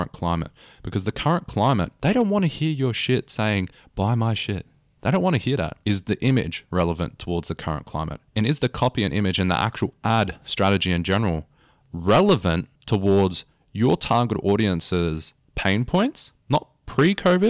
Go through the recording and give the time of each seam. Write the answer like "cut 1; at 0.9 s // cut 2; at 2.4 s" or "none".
cut 1; at 5.8 s // cut 2; at 12.7 s